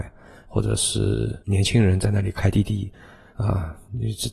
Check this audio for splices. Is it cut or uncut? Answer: uncut